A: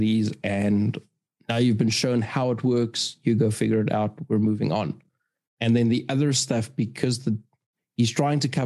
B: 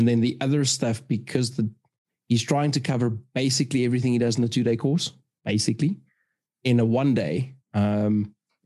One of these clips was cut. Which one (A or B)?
B